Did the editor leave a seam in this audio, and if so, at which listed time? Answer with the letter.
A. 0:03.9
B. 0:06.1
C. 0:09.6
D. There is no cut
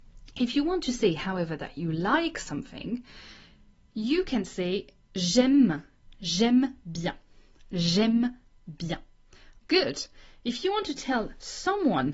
C